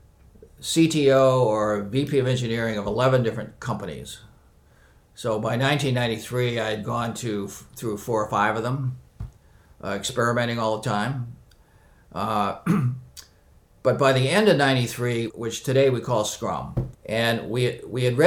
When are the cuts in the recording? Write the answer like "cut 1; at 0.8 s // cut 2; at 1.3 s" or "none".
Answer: cut 1; at 15.3 s // cut 2; at 16.9 s